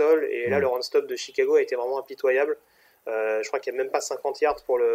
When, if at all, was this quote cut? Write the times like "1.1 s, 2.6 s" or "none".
none